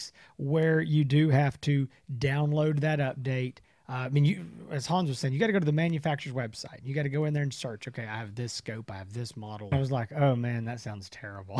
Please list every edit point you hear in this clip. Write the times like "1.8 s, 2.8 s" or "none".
9.7 s

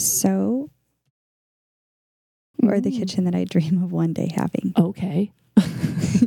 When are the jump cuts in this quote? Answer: 2.5 s

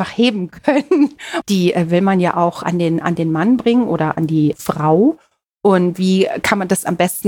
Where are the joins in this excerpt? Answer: 1.4 s

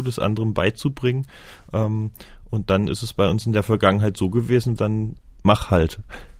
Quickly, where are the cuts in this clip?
4.8 s

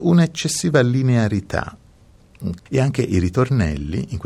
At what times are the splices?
2.6 s

